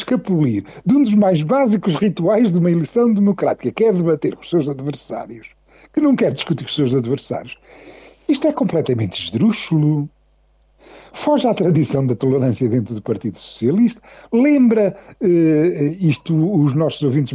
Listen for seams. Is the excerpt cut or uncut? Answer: uncut